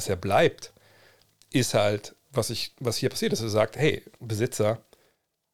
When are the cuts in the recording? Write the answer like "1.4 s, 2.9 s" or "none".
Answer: 2.2 s